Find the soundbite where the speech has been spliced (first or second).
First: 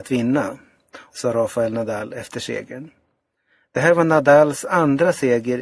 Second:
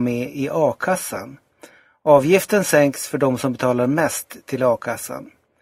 first